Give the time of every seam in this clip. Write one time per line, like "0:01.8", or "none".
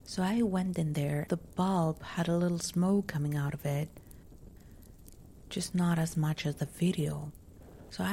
0:01.3